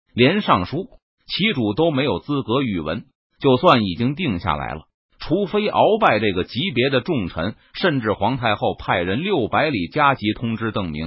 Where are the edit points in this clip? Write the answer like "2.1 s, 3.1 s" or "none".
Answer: none